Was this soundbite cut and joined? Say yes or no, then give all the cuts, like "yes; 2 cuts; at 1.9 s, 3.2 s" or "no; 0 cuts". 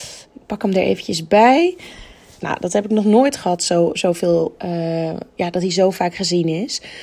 yes; 1 cut; at 2.4 s